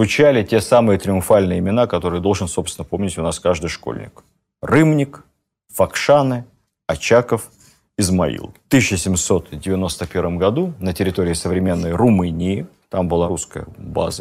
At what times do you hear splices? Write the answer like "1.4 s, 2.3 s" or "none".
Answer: none